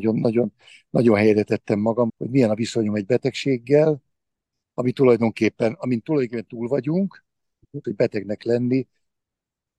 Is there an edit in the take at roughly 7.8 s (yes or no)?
yes